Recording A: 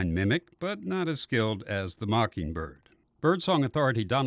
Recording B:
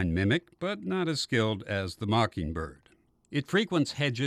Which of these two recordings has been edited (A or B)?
A